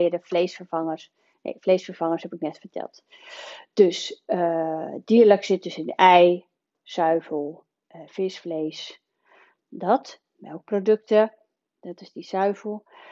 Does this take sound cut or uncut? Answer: uncut